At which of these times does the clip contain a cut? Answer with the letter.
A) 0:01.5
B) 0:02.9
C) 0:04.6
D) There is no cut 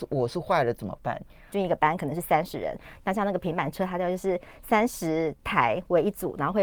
A